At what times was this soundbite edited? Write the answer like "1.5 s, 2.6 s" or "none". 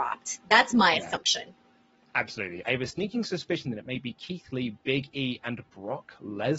2.6 s